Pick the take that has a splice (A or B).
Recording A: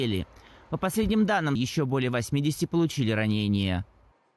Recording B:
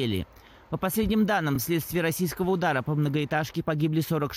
A